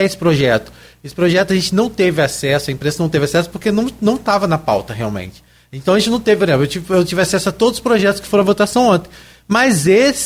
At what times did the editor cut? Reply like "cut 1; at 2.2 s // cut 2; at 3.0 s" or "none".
none